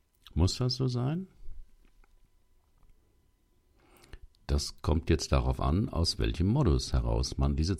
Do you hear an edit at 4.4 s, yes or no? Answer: no